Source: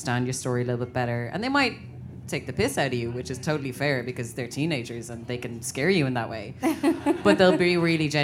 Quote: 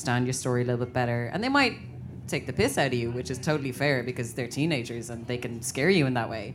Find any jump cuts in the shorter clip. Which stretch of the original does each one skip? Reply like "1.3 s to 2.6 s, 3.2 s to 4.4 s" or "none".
none

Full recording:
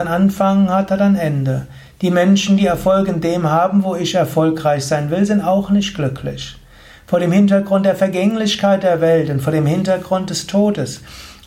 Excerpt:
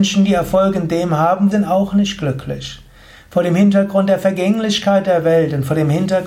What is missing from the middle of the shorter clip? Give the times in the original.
3.8 s to 5.3 s

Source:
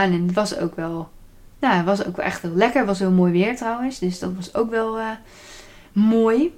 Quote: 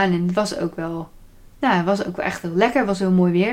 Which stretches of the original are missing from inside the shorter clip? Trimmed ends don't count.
none

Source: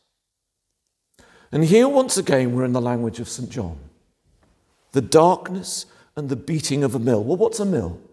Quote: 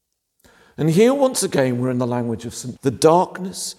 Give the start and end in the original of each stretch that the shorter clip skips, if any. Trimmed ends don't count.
3.5 s to 4.8 s

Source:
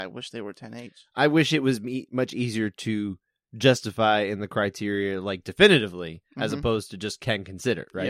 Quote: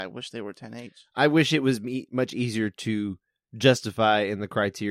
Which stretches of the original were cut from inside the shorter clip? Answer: none

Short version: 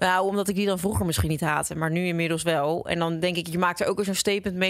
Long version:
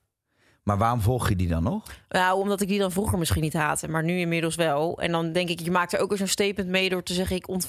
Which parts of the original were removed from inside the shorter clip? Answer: none

